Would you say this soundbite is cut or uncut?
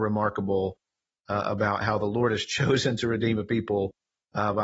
uncut